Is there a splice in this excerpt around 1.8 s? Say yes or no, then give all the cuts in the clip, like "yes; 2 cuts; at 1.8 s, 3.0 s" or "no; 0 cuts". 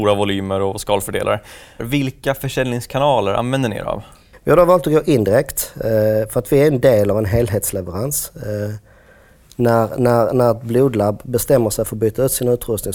yes; 1 cut; at 1.8 s